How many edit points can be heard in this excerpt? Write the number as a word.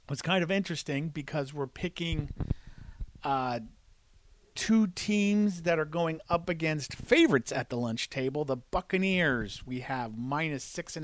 zero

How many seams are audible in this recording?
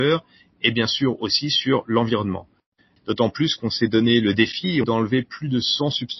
two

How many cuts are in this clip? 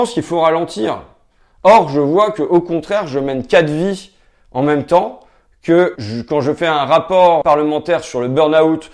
two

